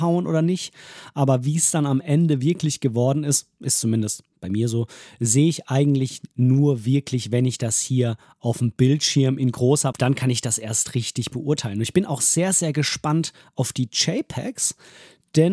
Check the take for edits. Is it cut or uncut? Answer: cut